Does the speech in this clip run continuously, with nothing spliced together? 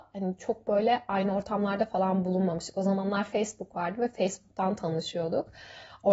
yes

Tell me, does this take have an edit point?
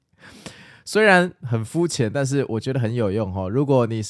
yes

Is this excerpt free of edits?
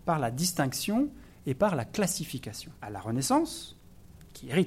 no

